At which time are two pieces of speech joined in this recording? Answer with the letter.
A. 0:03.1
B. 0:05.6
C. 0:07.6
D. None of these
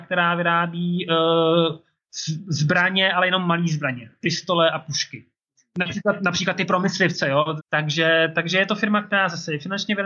C